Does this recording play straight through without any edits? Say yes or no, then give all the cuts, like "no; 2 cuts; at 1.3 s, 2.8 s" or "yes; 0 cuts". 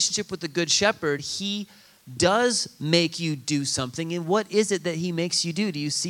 yes; 0 cuts